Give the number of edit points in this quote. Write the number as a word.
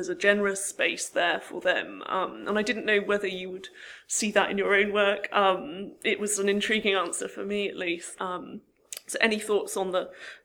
one